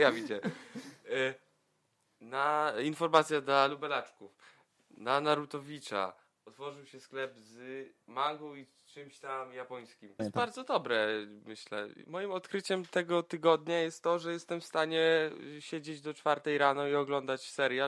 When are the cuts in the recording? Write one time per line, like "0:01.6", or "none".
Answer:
0:10.2